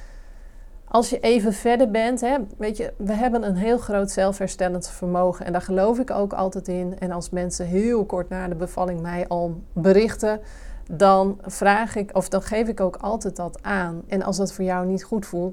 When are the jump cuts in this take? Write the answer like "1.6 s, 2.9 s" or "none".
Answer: 2.6 s, 14.1 s

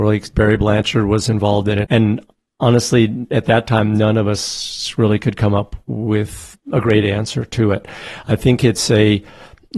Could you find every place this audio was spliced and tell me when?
1.8 s

